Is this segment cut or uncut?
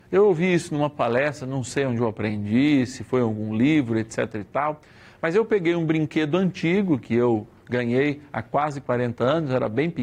uncut